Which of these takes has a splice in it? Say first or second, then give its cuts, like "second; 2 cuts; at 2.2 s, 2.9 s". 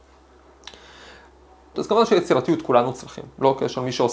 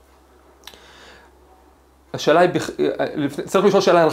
first; 1 cut; at 1.7 s